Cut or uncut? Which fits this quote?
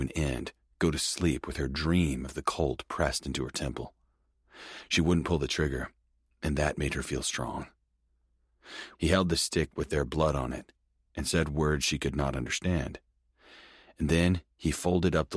cut